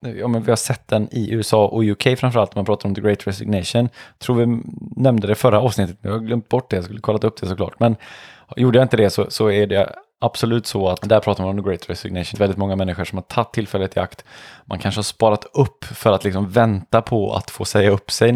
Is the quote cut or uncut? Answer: cut